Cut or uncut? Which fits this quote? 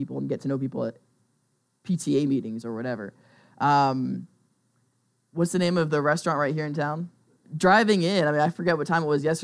cut